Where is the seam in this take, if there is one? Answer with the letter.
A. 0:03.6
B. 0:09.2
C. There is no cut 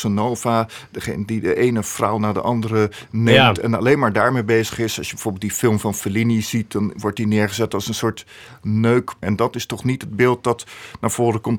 B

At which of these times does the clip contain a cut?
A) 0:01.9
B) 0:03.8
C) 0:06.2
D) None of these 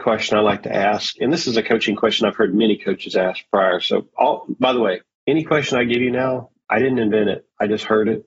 D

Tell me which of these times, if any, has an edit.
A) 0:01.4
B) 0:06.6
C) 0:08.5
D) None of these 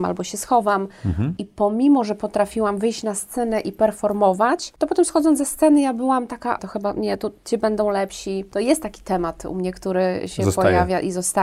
B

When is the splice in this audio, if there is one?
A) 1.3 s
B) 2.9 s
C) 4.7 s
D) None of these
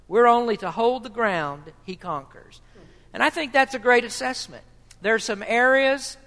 D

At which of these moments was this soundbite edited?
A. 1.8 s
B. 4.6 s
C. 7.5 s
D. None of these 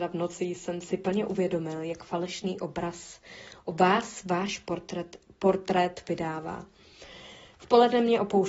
D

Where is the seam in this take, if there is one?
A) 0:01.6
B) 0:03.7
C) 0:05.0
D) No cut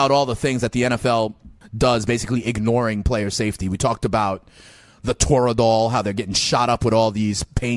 A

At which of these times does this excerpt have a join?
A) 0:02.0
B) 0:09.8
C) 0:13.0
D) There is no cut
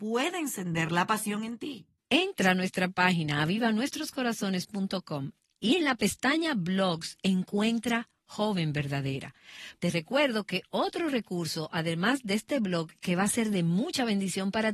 A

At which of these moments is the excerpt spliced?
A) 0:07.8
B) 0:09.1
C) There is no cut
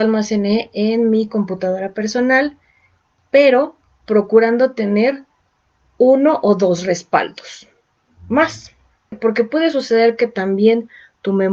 B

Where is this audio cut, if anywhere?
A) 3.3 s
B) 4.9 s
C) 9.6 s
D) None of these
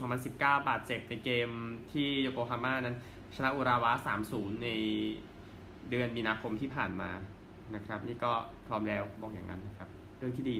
C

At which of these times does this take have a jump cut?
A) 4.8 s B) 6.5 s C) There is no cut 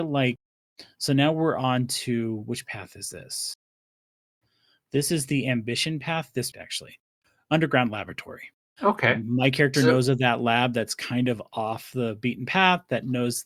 B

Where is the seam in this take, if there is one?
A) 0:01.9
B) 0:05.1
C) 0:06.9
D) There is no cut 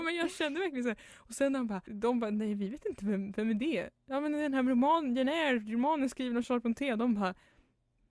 A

